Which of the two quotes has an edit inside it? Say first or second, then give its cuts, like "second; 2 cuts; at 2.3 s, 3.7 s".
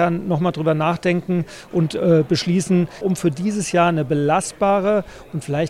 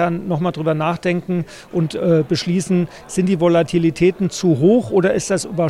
first; 1 cut; at 3.0 s